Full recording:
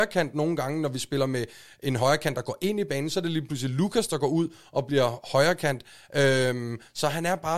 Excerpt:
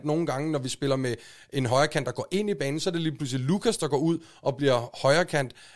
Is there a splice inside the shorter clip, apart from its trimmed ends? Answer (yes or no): no